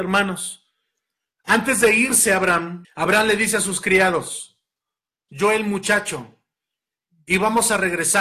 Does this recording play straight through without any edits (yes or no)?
no